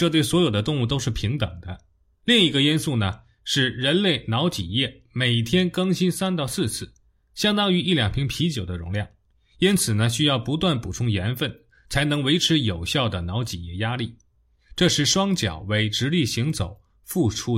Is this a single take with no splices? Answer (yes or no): no